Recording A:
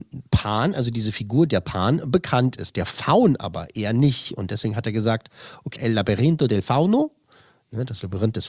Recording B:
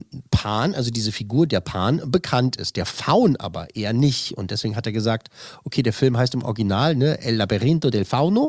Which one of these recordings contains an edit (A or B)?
A